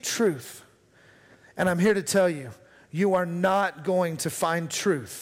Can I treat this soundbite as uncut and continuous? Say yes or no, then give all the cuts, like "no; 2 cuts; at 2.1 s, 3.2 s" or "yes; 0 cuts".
yes; 0 cuts